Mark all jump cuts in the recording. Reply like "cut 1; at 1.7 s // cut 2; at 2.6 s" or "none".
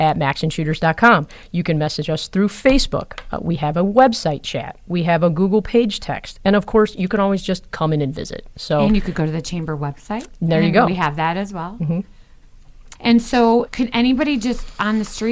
cut 1; at 13.0 s